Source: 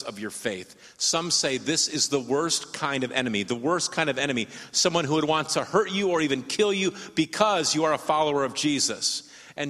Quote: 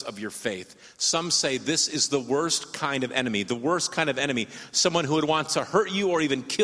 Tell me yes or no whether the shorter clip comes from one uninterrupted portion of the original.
yes